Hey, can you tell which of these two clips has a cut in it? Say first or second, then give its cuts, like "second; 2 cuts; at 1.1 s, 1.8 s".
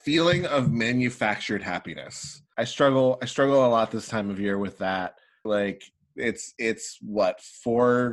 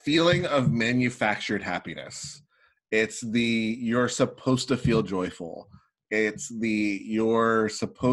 first; 2 cuts; at 2.5 s, 5.5 s